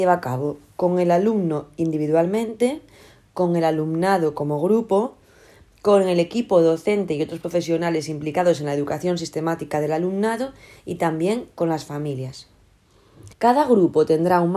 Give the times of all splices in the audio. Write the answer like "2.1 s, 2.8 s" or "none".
13.3 s